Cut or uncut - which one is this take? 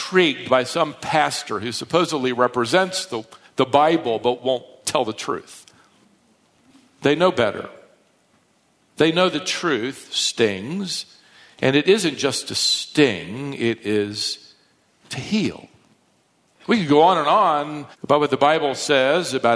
cut